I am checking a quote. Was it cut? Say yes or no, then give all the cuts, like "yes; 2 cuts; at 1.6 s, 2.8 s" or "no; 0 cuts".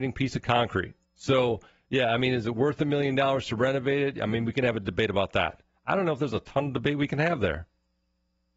yes; 2 cuts; at 1.0 s, 5.7 s